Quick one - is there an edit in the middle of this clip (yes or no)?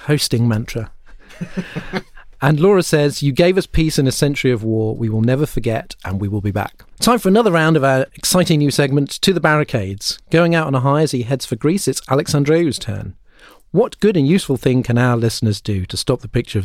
no